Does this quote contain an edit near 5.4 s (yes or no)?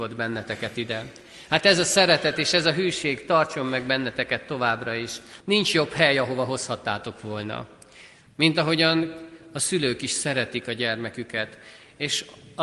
yes